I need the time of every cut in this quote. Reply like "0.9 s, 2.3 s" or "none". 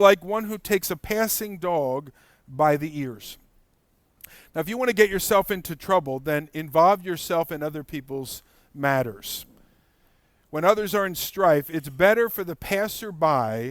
none